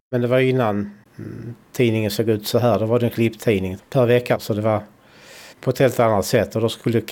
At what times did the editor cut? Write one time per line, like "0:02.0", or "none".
0:03.8
0:05.5